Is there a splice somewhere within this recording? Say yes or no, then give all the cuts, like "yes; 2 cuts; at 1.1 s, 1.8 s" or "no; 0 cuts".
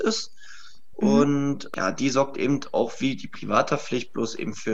no; 0 cuts